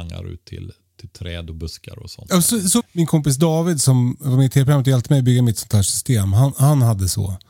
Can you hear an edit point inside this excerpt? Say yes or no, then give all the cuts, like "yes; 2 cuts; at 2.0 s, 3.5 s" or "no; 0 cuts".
yes; 1 cut; at 2.8 s